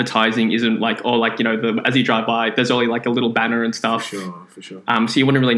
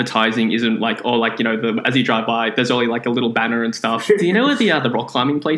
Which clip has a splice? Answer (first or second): second